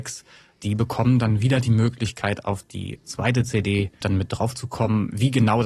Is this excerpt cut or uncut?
cut